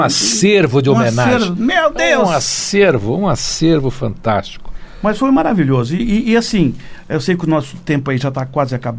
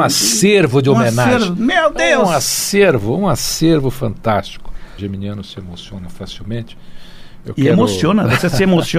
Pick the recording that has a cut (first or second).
second